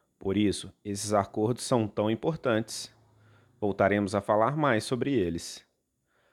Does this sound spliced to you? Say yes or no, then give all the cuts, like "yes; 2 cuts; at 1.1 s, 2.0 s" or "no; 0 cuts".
no; 0 cuts